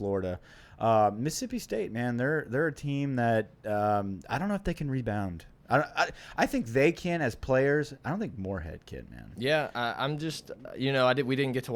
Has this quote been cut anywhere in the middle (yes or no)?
no